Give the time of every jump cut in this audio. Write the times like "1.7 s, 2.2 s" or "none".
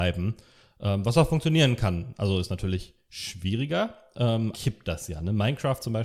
4.5 s